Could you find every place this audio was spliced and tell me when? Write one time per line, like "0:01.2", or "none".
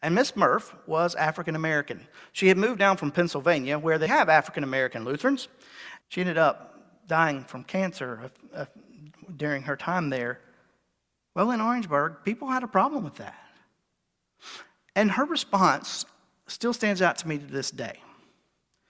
0:04.1
0:06.0
0:11.1